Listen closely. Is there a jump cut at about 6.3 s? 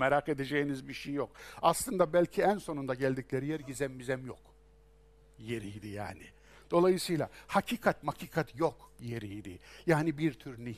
no; 0 cuts

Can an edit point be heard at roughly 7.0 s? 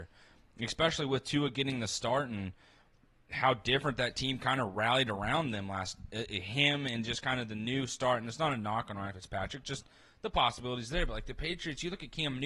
no; 0 cuts

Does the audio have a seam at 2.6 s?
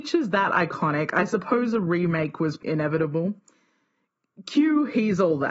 yes; 1 cut; at 2.6 s

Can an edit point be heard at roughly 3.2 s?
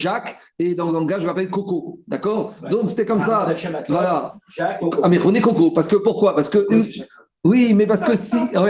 no; 1 cut; at 4.8 s

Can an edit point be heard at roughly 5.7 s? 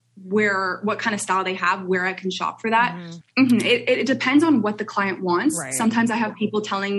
no; 1 cut; at 3.2 s

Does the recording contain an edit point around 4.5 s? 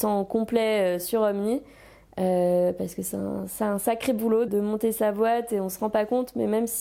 yes; 1 cut; at 4.5 s

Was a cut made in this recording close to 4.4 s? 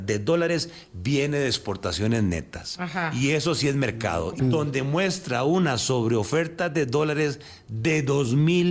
yes; 1 cut; at 4.4 s

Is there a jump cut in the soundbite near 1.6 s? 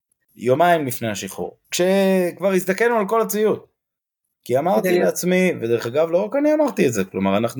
yes; 1 cut; at 1.6 s

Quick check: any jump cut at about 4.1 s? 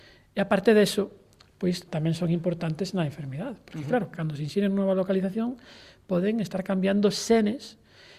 yes; 2 cuts; at 1.9 s, 4.1 s

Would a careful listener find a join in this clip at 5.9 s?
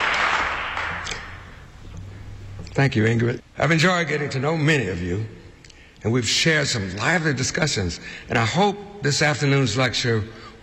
no; 1 cut; at 3.4 s

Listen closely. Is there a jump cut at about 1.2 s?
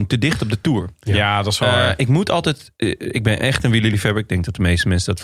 no; 0 cuts

